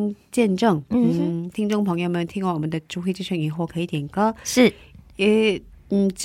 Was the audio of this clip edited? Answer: yes; 1 cut; at 3.7 s

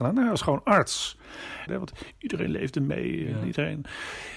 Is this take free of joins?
no; 1 cut; at 1.7 s

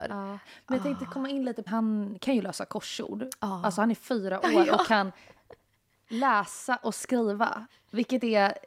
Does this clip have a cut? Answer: yes; 1 cut; at 1.7 s

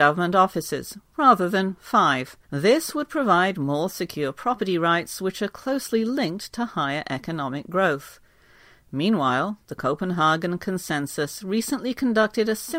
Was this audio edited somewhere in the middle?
yes; 1 cut; at 2.4 s

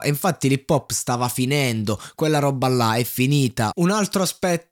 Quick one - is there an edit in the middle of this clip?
yes; 1 cut; at 3.7 s

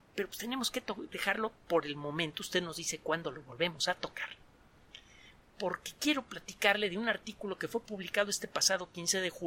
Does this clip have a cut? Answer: no; 0 cuts

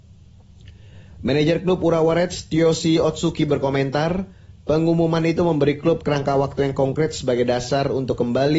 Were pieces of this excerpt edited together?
no; 0 cuts

